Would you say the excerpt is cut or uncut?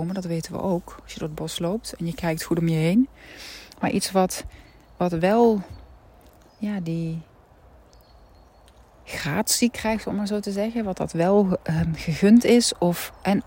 uncut